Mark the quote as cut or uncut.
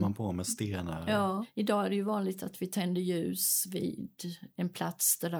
uncut